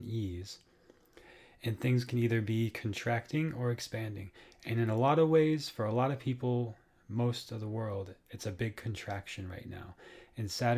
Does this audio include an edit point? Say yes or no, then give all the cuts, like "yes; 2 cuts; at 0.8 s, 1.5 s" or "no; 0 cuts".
no; 0 cuts